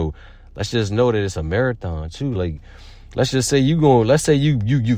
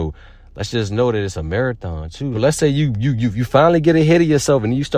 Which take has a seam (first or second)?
second